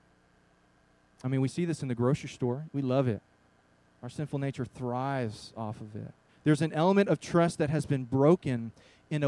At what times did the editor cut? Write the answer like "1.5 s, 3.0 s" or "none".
2.7 s, 6.3 s